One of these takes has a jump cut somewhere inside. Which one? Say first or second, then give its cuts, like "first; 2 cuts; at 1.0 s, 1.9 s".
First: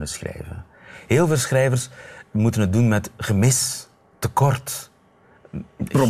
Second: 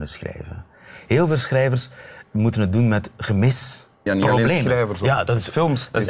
second; 1 cut; at 4.1 s